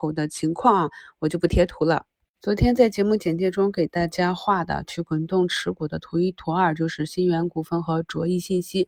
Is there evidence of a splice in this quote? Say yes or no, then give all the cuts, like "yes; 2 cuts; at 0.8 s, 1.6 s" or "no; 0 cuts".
no; 0 cuts